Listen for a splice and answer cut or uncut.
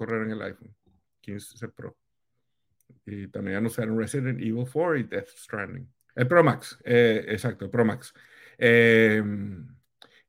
cut